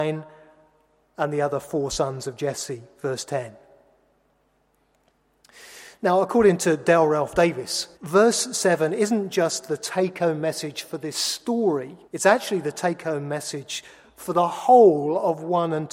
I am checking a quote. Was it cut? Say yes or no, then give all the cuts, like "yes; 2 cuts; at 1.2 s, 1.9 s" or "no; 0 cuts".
yes; 2 cuts; at 7.9 s, 12.0 s